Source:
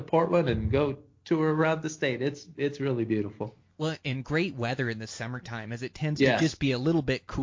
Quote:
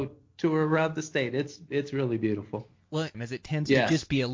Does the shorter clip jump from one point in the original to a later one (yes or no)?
yes